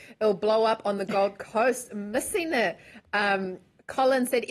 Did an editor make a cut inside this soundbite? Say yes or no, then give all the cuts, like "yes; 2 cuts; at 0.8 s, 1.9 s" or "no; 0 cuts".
no; 0 cuts